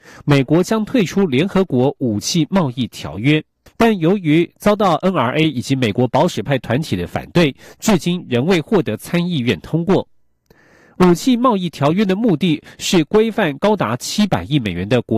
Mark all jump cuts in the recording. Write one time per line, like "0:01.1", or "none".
0:03.7